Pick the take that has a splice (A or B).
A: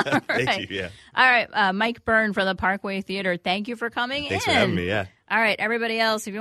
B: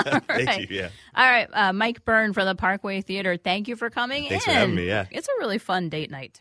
B